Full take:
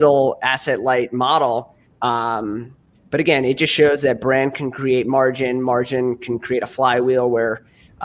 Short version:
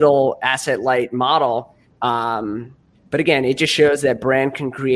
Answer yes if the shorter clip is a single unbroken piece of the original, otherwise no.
yes